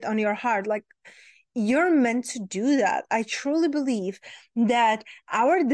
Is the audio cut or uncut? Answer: uncut